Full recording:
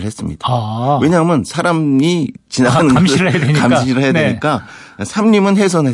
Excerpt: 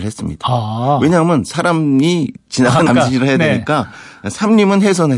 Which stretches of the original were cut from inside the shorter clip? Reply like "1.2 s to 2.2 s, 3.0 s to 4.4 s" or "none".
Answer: 2.9 s to 3.6 s